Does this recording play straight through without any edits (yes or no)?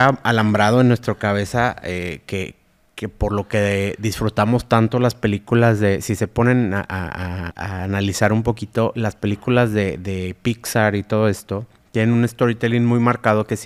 no